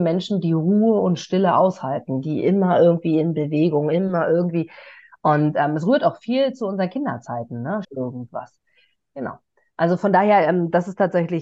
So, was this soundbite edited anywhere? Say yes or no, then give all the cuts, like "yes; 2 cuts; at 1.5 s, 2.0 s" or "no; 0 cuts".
yes; 1 cut; at 7.8 s